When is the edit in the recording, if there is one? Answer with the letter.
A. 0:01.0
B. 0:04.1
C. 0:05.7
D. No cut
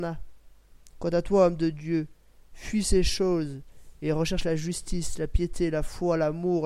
A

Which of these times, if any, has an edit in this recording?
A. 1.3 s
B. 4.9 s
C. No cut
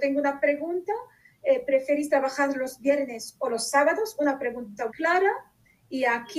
B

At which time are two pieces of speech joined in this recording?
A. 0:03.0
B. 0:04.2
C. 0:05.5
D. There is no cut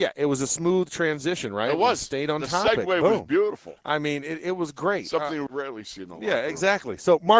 C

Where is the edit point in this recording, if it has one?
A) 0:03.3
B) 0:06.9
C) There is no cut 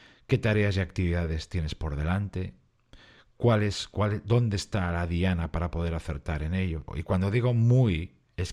B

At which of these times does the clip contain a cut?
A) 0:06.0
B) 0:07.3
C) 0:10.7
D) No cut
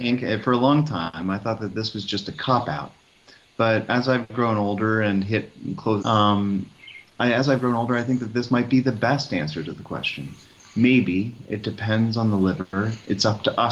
A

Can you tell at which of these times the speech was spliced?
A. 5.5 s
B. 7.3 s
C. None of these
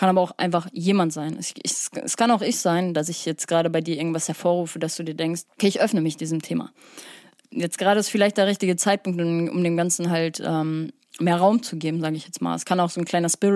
A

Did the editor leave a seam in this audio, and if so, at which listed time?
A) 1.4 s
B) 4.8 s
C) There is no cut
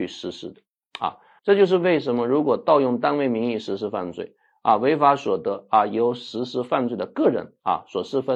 A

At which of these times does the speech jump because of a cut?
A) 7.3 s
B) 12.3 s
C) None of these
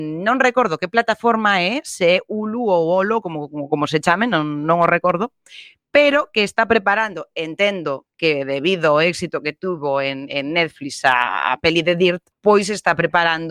B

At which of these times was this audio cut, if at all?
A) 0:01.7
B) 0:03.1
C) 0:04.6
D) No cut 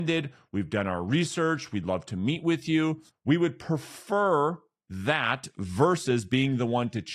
B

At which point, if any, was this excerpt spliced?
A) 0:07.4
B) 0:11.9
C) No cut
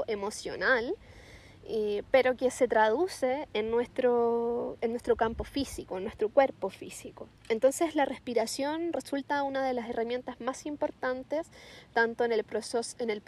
A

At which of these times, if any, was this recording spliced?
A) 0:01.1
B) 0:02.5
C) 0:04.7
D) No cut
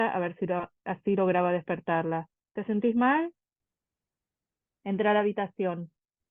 B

